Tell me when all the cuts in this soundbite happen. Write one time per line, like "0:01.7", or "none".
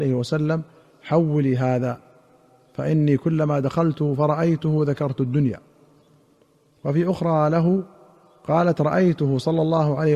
none